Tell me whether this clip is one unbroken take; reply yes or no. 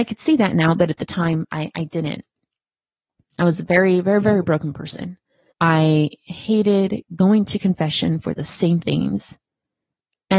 no